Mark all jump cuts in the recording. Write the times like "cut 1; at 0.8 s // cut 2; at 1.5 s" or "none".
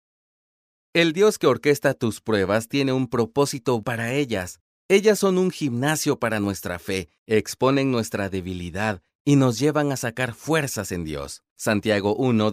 cut 1; at 3.8 s // cut 2; at 11.5 s